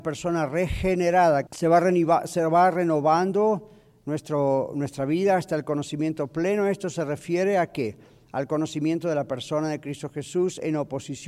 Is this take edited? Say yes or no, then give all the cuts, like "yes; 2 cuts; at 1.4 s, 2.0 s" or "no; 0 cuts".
yes; 1 cut; at 1.5 s